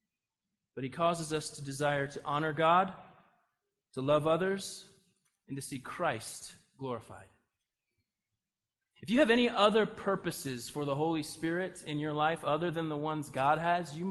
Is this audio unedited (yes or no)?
yes